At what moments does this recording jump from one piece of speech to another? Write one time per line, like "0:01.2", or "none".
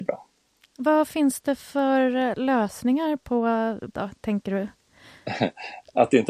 0:03.9